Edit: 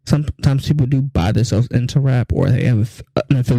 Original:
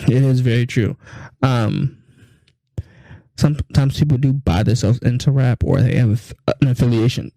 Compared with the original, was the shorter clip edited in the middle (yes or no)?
no